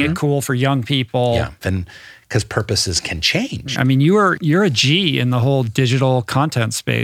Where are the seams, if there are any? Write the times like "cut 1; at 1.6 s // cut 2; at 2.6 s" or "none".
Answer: cut 1; at 1.6 s // cut 2; at 3.7 s